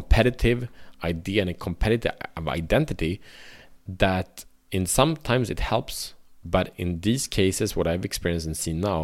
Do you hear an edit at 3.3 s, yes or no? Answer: no